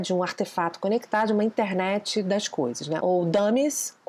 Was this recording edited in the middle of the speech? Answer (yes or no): yes